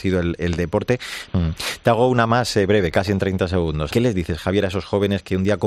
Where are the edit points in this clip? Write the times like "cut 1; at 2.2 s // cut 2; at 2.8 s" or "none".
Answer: cut 1; at 1.3 s // cut 2; at 3.9 s